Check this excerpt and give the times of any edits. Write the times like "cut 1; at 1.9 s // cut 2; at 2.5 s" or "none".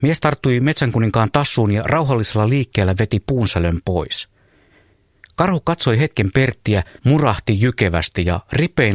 cut 1; at 7.0 s